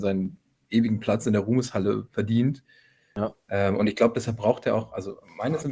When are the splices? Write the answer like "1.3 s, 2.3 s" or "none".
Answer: none